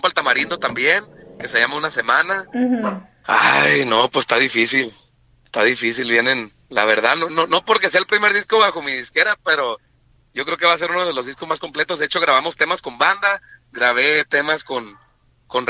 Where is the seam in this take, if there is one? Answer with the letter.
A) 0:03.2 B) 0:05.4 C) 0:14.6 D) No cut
A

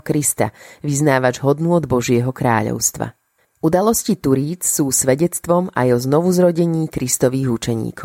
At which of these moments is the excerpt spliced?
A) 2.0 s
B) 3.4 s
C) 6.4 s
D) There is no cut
B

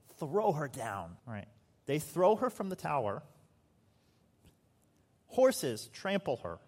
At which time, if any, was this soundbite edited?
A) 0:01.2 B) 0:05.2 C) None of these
A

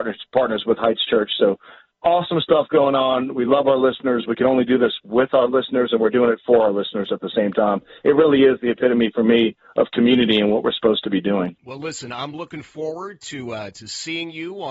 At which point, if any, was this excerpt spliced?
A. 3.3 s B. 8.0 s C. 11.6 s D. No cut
C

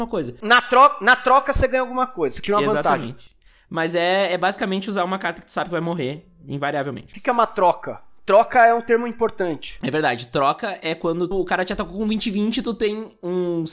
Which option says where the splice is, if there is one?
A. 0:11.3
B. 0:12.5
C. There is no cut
A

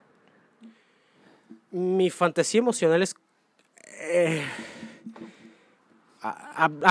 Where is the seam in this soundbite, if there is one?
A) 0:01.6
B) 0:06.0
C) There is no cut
C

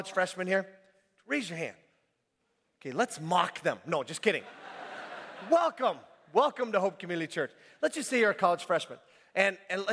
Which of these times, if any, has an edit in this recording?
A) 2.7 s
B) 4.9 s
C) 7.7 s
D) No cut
D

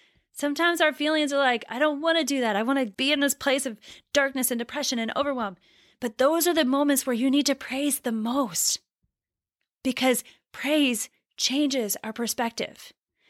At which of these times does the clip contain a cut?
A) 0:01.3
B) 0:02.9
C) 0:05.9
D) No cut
B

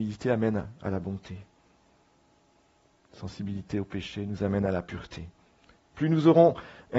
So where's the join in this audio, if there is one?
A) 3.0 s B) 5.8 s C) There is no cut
A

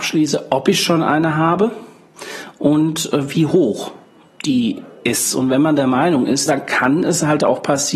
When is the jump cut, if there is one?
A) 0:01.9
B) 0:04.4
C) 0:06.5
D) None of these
C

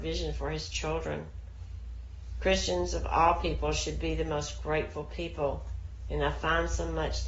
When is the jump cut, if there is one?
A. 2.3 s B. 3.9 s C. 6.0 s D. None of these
D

